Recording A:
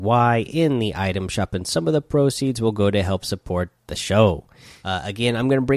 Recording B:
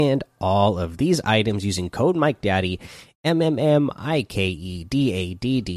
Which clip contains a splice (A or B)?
A